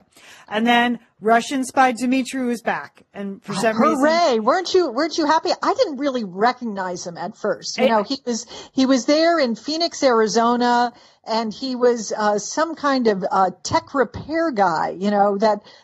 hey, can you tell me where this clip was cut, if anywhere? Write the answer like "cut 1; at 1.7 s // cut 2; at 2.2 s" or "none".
none